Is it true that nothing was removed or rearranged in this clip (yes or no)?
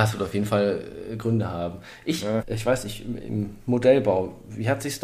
no